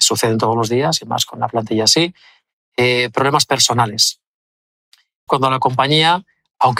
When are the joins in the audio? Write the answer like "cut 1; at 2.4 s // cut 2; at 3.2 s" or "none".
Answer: cut 1; at 5.3 s